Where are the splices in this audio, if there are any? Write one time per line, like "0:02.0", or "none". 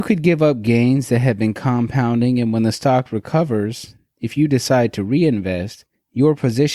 none